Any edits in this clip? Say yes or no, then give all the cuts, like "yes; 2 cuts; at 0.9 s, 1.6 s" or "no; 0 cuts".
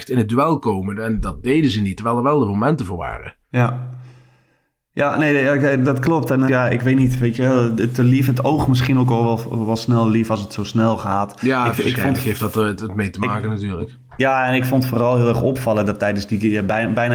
yes; 2 cuts; at 3.4 s, 6.5 s